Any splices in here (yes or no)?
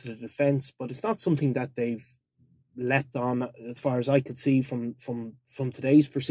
no